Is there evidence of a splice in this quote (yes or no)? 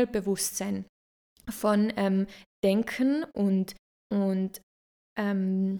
no